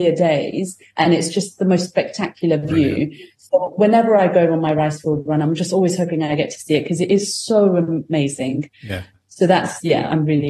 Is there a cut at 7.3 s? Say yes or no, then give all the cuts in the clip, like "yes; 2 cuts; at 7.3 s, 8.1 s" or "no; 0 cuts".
no; 0 cuts